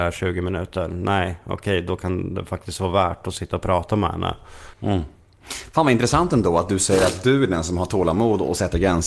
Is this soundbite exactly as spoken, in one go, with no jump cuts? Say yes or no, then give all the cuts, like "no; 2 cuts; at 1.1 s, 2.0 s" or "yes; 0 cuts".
no; 1 cut; at 4.7 s